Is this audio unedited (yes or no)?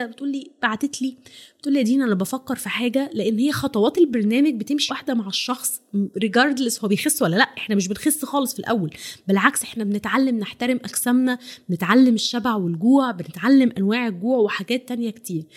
no